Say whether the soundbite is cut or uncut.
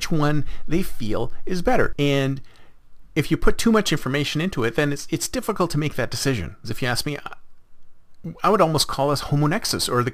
cut